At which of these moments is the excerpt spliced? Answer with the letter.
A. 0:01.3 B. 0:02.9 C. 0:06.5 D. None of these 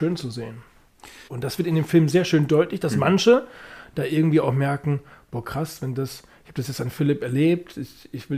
A